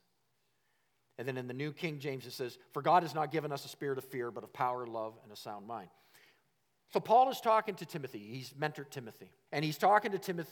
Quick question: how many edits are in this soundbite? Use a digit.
1